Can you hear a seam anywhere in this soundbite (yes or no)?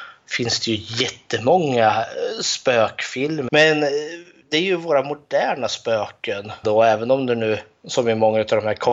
yes